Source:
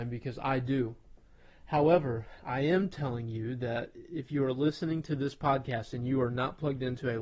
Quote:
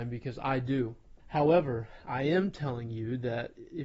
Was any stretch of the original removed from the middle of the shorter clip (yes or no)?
yes